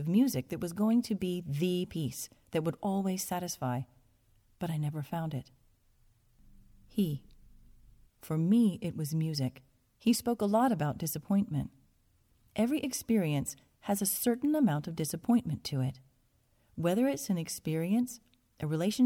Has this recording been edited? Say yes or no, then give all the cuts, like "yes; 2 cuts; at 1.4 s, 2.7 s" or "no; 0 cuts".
yes; 2 cuts; at 8.0 s, 9.9 s